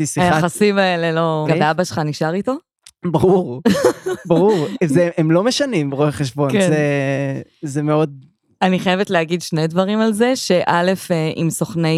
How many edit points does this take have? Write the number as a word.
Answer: one